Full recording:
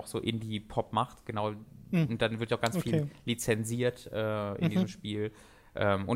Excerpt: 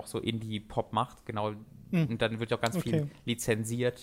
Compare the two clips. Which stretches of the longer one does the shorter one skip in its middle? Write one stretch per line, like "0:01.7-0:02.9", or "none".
none